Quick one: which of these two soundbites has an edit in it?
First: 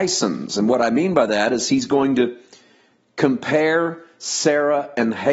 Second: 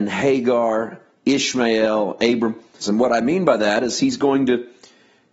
second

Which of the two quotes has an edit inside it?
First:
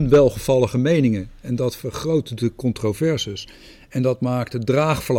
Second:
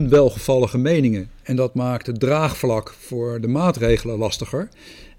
second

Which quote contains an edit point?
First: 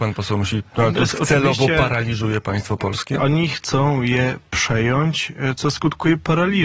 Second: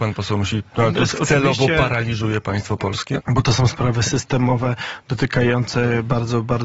second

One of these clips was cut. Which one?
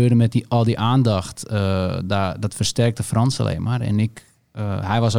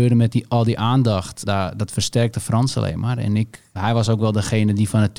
second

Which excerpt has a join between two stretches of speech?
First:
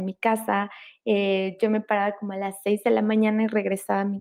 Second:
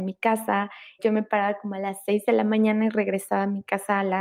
second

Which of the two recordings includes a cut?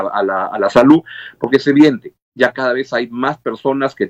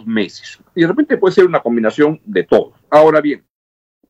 second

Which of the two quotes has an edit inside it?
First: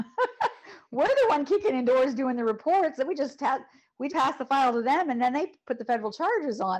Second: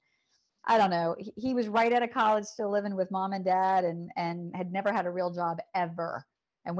first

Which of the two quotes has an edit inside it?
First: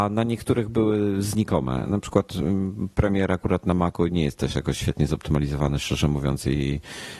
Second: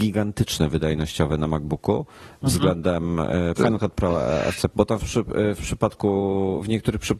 second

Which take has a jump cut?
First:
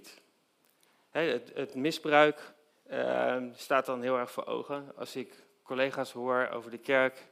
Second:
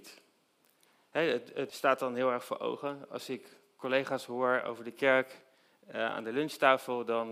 second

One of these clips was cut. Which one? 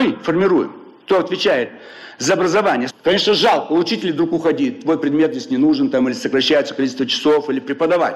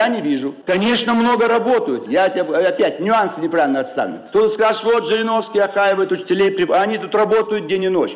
first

